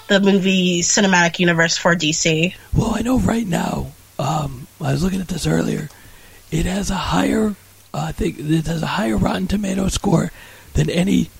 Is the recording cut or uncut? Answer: uncut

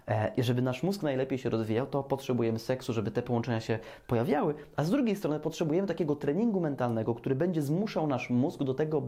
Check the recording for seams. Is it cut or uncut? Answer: uncut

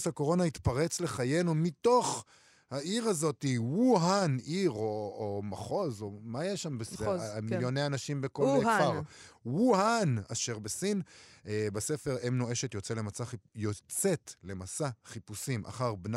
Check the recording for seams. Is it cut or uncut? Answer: cut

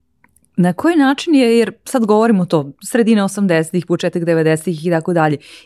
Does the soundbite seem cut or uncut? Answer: uncut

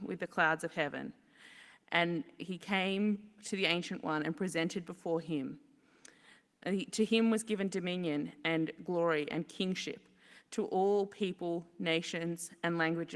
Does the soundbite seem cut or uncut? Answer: uncut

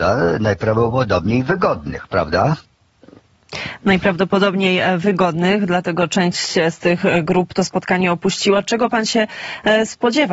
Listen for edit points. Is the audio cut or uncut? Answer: uncut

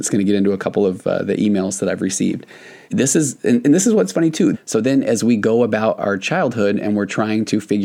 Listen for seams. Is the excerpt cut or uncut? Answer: cut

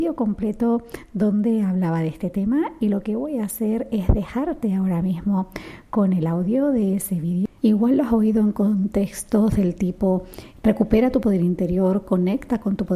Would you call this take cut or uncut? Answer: cut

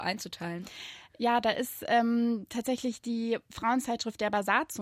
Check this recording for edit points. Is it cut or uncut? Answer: uncut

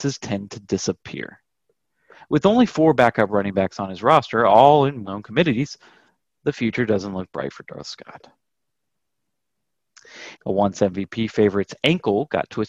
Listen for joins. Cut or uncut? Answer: cut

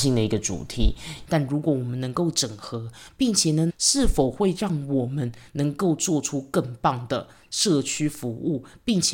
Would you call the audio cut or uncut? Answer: cut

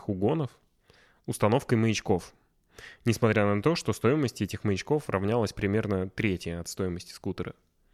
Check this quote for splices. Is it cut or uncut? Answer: uncut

